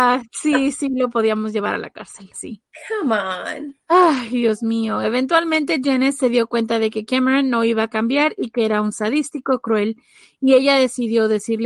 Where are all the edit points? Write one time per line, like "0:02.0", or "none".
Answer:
0:02.3
0:03.8